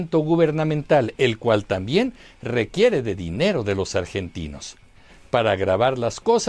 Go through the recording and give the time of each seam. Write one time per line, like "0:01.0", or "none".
none